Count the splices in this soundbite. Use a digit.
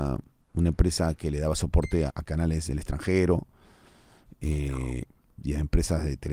1